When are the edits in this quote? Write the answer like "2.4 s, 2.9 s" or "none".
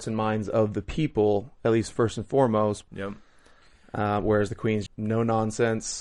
2.9 s, 4.9 s